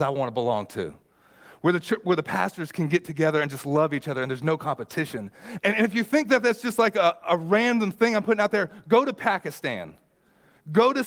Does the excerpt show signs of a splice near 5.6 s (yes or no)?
yes